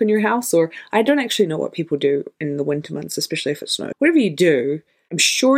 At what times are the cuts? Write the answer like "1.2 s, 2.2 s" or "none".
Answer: 3.9 s

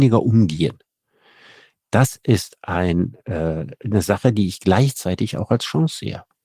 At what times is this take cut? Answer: none

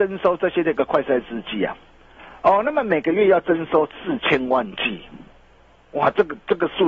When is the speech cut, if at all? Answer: none

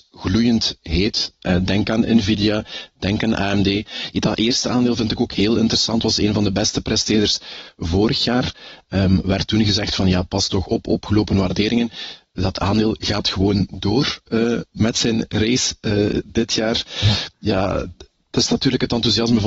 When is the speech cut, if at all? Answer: none

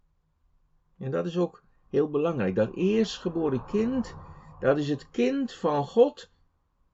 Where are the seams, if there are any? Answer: none

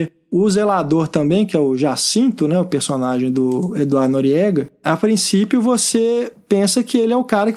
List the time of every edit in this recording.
none

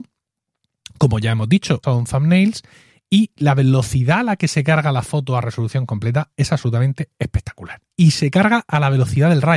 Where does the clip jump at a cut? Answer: 1.8 s, 7.9 s

